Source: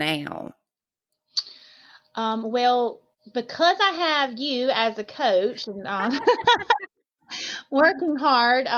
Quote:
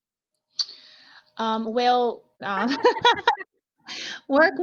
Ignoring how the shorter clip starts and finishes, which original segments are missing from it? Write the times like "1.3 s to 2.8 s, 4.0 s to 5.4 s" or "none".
3.2 s to 5.8 s